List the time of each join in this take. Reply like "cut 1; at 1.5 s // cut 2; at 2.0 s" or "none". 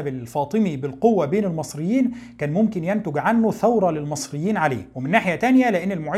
cut 1; at 4.9 s